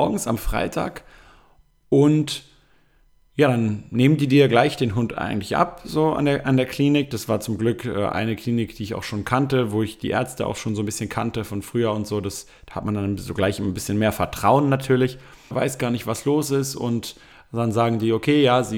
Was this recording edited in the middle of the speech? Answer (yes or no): yes